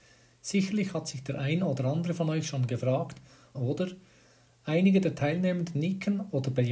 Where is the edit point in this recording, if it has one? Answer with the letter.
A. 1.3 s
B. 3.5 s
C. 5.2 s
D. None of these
B